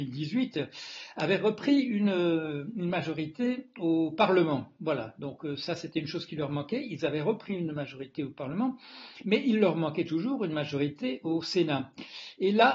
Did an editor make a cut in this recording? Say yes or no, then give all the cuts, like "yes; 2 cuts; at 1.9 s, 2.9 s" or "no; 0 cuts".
no; 0 cuts